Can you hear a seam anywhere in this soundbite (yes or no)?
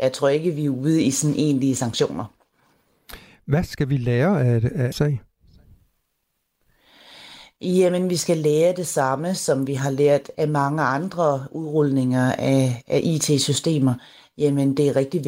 yes